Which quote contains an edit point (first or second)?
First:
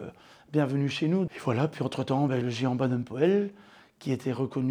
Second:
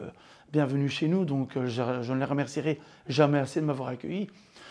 first